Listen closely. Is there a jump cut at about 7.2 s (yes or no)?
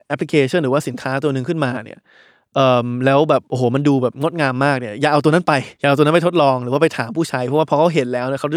no